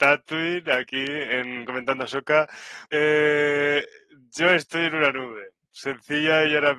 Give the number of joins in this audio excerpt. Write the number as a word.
one